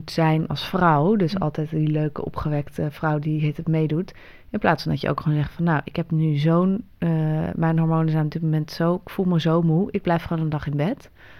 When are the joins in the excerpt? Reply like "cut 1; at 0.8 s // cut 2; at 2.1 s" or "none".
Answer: none